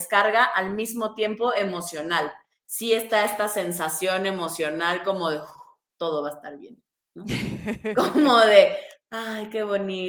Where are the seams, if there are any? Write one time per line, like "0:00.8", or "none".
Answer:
none